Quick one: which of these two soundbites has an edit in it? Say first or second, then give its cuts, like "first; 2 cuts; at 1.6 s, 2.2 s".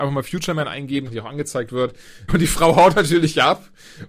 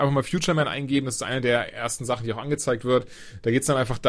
first; 2 cuts; at 1.1 s, 2.3 s